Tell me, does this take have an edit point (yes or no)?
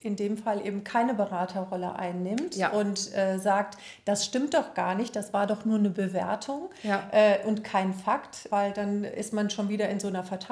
yes